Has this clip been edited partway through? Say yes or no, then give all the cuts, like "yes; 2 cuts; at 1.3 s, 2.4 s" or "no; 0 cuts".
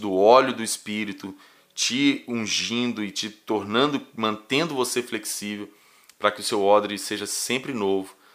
no; 0 cuts